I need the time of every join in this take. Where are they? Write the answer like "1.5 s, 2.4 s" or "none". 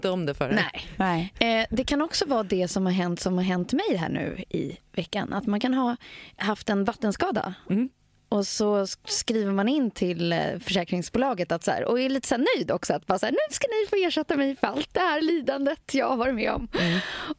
6.4 s